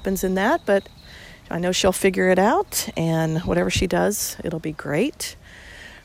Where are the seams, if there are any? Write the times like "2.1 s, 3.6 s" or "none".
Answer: none